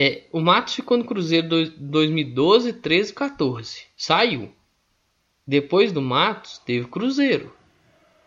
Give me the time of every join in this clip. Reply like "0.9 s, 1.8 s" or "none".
none